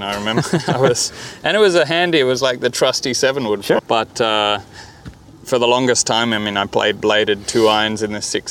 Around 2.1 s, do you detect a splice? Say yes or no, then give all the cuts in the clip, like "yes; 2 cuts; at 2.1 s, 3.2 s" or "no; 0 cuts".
no; 1 cut; at 3.8 s